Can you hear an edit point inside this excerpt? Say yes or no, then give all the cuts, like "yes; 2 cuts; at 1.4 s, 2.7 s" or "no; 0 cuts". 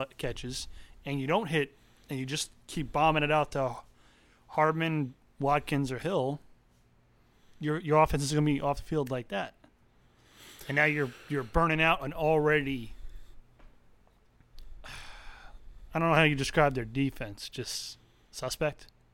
no; 0 cuts